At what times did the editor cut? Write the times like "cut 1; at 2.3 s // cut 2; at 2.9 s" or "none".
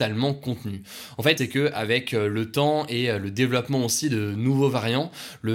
cut 1; at 1.4 s